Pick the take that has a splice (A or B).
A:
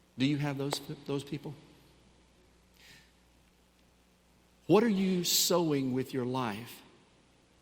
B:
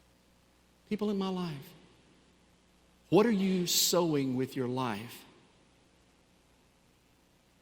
B